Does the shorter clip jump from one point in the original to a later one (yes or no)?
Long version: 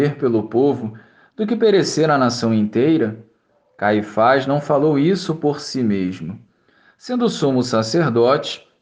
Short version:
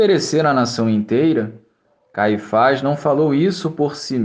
no